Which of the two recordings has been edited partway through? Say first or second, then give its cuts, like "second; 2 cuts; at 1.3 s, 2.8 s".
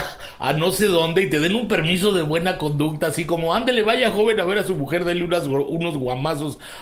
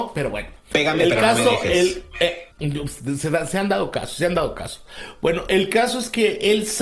second; 1 cut; at 2.5 s